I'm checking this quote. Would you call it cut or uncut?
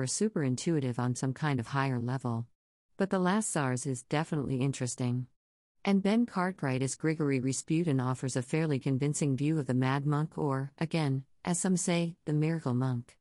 cut